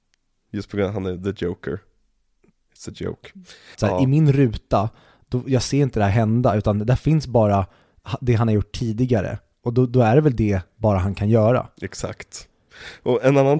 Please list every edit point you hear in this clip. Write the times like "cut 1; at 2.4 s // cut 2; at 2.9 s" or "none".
cut 1; at 3.7 s